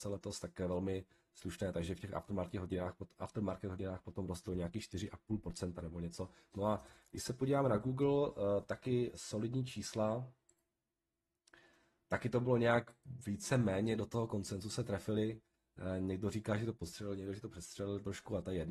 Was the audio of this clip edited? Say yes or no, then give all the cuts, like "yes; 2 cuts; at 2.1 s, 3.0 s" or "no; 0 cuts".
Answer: yes; 1 cut; at 6.5 s